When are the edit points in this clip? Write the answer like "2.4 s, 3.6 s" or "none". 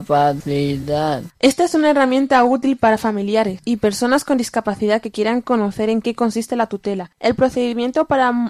1.3 s